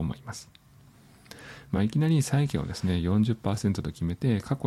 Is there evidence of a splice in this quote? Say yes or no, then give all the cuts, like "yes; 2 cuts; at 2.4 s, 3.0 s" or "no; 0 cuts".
no; 0 cuts